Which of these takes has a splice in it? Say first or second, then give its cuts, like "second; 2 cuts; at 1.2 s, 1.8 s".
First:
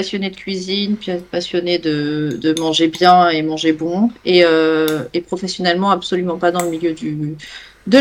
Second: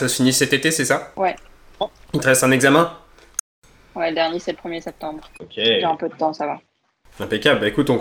second; 1 cut; at 5.3 s